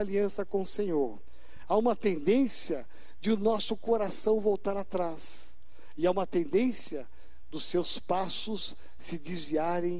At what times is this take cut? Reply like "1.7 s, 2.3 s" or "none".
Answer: none